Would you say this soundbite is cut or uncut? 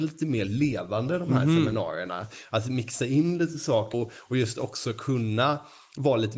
cut